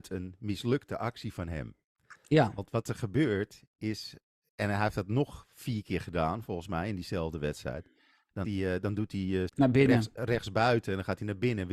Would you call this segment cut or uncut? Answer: cut